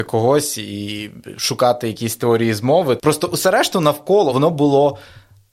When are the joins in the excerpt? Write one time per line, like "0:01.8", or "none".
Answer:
0:03.0
0:04.3